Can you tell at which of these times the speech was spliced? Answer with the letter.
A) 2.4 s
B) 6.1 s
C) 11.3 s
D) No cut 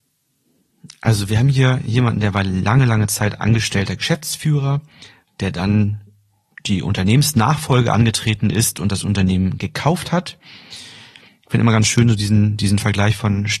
C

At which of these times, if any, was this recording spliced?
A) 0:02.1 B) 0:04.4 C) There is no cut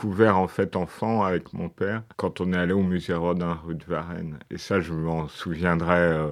A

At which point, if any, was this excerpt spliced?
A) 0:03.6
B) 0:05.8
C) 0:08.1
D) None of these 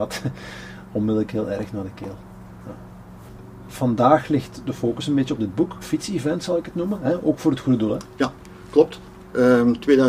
B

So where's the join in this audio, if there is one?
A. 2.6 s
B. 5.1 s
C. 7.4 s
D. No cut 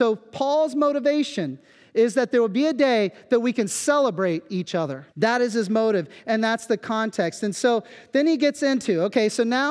B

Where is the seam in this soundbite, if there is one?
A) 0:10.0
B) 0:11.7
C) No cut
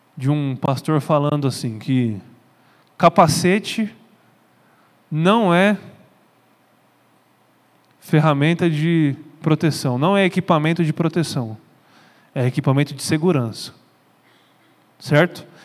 C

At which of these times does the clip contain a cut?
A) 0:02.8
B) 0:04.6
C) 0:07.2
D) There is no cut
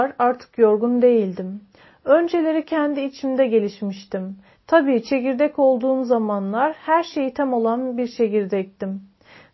B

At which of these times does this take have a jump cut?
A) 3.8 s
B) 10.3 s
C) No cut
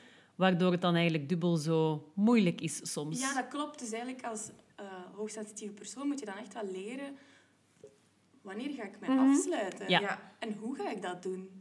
C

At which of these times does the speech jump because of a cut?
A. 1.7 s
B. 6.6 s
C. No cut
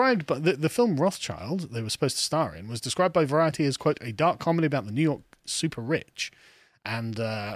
C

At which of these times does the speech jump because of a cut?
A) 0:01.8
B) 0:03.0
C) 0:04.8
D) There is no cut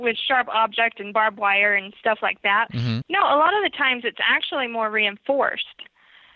B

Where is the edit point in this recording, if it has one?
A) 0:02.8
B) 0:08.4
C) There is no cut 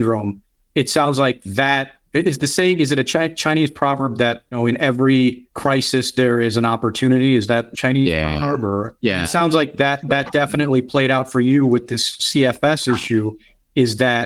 C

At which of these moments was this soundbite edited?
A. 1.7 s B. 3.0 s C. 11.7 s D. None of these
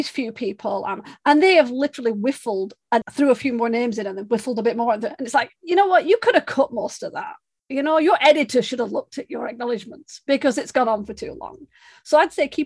B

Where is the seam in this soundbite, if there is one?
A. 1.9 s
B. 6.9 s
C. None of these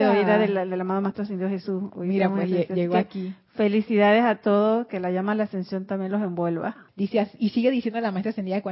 B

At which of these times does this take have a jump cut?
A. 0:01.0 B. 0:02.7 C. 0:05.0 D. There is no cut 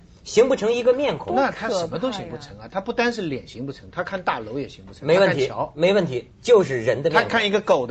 D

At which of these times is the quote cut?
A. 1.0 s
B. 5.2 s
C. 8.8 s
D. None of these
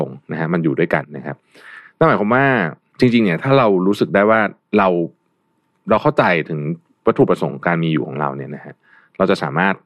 A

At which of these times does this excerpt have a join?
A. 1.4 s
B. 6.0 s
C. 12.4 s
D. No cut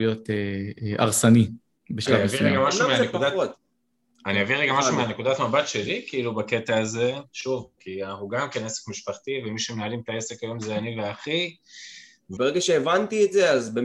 C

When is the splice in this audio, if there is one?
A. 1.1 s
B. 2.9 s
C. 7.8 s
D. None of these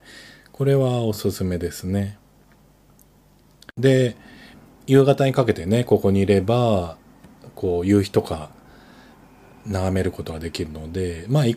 D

